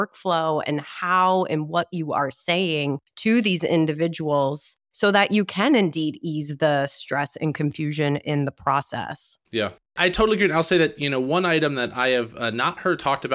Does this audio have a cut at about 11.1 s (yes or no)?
no